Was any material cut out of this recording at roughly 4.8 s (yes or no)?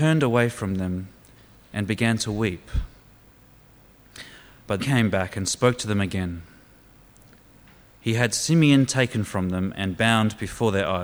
yes